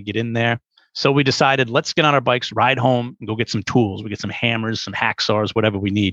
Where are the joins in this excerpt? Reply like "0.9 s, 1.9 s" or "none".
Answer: none